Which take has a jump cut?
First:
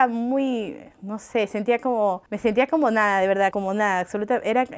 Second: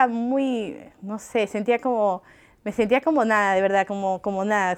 first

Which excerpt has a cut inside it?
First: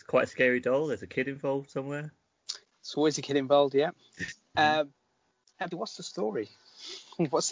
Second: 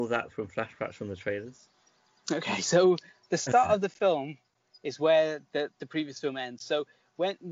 first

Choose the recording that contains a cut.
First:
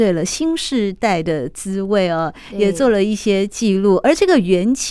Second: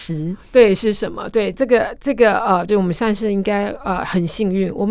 second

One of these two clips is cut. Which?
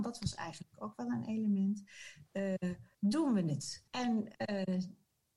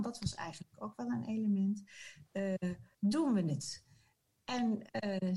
first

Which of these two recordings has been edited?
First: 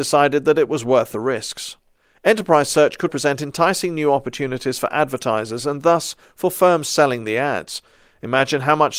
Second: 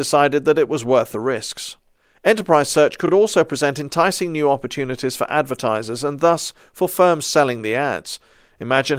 first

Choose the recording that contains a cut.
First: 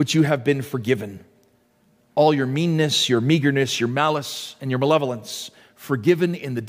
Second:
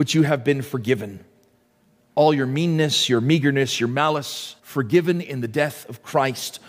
second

